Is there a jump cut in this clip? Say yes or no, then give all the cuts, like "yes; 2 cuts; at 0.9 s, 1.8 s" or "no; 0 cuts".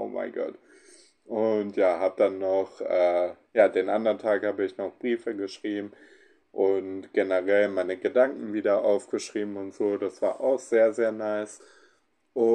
no; 0 cuts